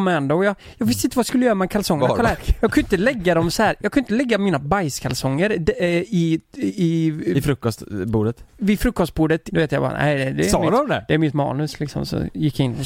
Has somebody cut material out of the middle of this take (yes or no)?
yes